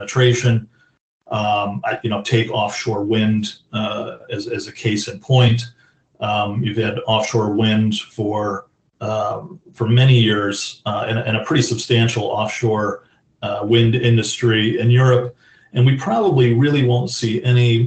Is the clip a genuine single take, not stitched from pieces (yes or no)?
yes